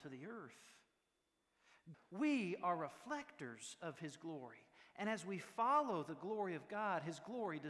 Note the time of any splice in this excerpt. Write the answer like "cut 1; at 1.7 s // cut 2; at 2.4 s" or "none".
cut 1; at 1.9 s